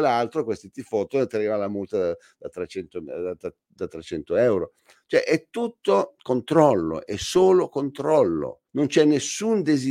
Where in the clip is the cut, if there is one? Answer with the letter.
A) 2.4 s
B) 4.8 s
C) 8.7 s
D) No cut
C